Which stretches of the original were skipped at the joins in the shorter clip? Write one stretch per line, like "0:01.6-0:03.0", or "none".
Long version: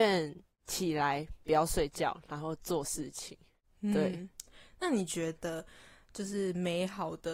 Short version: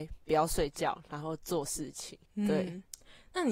0:03.4-0:03.7